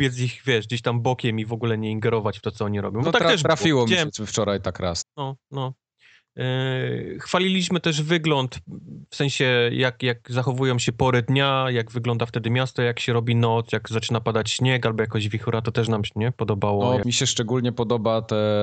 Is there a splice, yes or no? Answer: yes